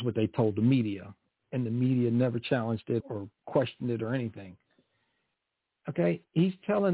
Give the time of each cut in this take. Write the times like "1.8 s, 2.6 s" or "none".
3.0 s, 5.7 s